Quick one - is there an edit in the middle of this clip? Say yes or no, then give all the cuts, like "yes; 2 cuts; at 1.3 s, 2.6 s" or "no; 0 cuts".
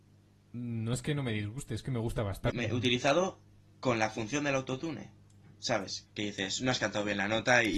yes; 2 cuts; at 2.5 s, 6.1 s